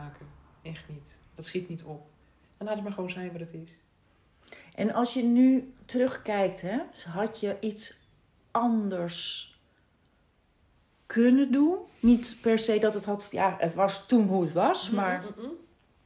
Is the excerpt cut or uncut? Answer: uncut